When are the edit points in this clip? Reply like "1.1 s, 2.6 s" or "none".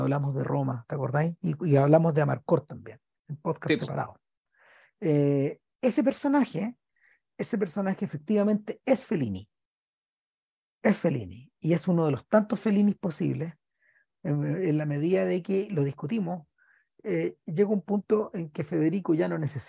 none